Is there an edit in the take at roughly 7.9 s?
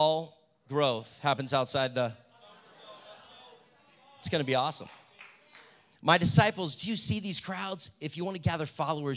no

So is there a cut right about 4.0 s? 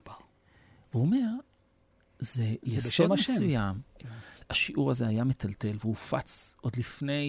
yes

